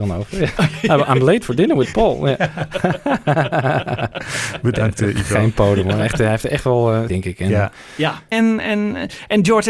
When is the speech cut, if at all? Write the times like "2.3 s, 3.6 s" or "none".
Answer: 7.1 s, 8.3 s